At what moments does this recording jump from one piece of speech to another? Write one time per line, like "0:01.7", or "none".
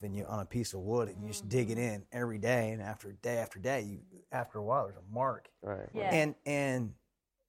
0:05.9